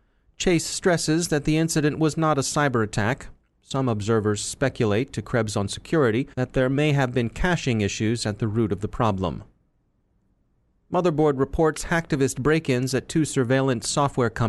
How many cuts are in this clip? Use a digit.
1